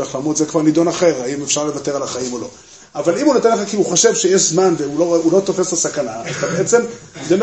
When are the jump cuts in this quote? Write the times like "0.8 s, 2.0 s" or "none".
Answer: none